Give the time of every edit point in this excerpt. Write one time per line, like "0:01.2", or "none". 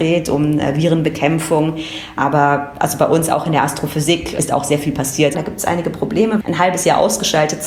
0:05.3
0:06.4